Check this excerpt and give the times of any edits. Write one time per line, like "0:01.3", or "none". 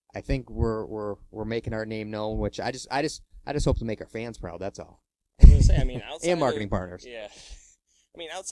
none